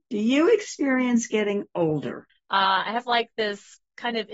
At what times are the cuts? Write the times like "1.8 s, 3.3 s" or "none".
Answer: 2.3 s

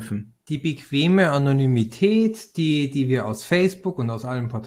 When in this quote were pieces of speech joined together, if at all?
none

